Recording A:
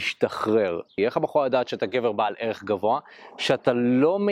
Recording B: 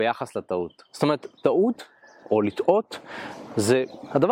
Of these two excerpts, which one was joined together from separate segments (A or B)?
A